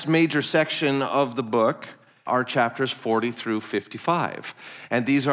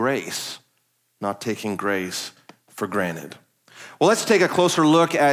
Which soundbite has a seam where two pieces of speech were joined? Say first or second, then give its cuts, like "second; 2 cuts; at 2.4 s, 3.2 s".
first; 1 cut; at 2.3 s